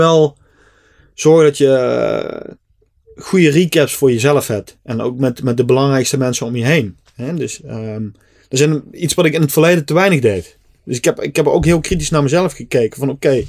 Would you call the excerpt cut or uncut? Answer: uncut